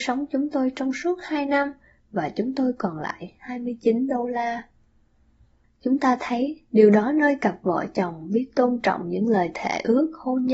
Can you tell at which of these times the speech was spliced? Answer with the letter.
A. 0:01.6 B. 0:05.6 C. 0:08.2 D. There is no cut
B